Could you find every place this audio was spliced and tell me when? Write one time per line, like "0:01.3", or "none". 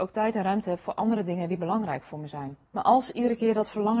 0:02.7